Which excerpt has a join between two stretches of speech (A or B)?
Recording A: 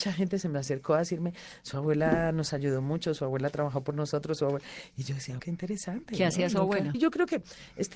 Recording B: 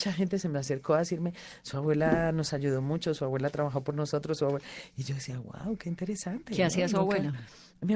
A